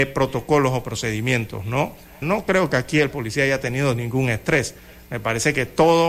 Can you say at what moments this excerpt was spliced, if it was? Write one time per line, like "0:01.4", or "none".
0:02.2